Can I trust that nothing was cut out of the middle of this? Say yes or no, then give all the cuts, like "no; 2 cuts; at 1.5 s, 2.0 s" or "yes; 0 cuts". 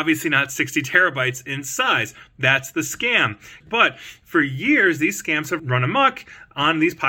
no; 2 cuts; at 3.6 s, 5.6 s